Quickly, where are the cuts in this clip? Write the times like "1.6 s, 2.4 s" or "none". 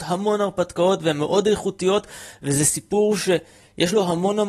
none